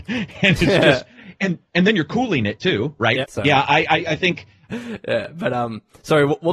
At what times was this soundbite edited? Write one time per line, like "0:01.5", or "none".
0:03.2
0:04.7